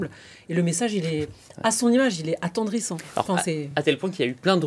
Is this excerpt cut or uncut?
uncut